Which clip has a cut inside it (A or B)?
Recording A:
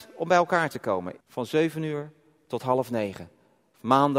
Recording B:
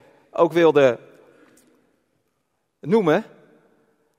A